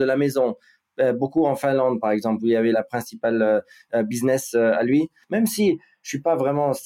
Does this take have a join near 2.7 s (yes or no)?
yes